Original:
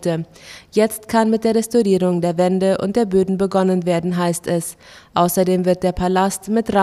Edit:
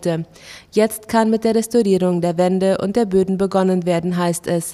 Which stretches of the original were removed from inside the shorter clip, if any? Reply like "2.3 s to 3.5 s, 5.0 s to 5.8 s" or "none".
none